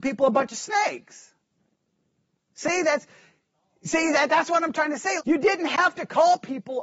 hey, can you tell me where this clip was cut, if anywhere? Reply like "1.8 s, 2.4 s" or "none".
5.2 s